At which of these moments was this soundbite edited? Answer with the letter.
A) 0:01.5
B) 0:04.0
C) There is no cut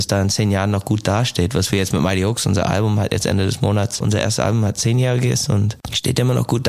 B